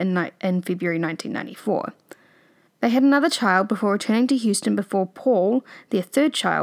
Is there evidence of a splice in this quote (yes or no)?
yes